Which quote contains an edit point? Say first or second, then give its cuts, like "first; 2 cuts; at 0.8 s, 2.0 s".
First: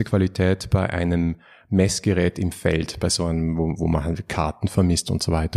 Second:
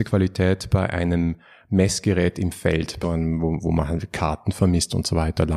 second; 1 cut; at 3.0 s